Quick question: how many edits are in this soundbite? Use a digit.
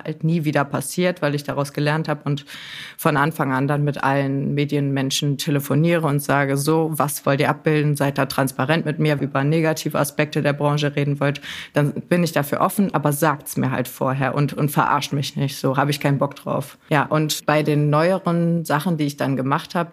1